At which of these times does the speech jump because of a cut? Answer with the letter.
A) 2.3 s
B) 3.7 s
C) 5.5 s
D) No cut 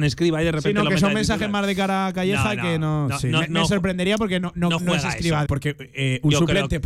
C